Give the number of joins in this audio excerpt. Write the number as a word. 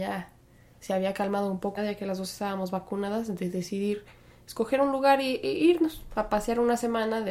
one